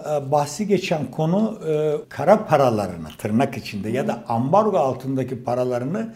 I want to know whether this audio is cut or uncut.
cut